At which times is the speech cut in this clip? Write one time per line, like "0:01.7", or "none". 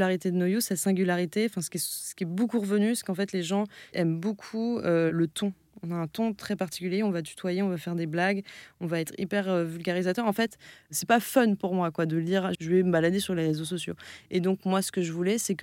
0:12.5